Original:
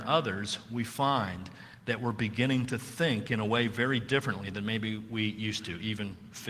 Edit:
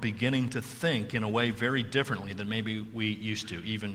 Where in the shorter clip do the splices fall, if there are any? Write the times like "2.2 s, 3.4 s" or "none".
none